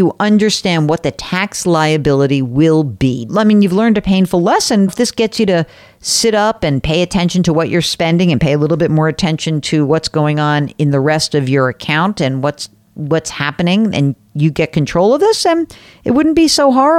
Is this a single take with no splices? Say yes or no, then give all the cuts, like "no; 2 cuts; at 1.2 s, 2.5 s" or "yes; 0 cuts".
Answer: no; 2 cuts; at 3.3 s, 4.9 s